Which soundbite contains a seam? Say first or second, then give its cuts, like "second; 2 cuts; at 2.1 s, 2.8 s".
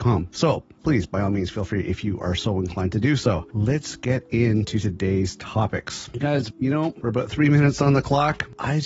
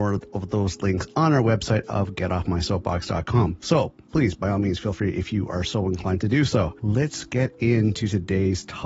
first; 1 cut; at 6.5 s